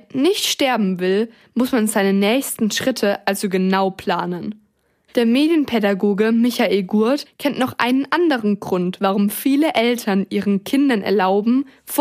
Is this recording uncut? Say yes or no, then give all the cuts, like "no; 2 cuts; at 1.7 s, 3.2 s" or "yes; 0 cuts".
yes; 0 cuts